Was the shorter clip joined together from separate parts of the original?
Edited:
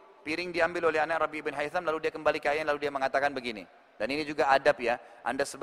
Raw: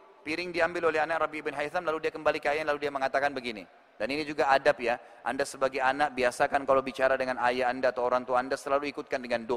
no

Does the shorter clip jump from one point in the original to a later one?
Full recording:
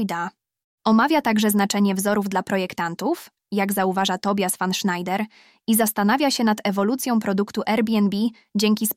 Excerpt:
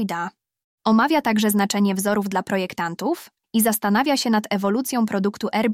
yes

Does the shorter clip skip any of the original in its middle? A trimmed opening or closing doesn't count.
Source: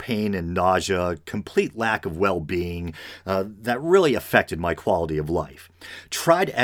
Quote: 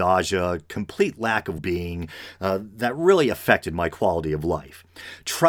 yes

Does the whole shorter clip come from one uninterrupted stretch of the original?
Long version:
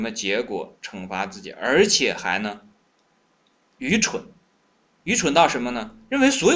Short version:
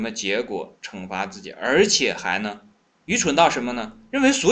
no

